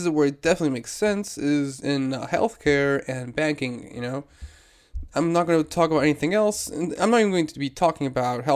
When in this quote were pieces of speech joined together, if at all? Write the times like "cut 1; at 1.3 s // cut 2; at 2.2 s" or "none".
none